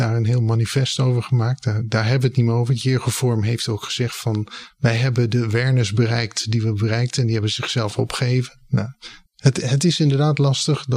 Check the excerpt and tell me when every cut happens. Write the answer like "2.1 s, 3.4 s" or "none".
none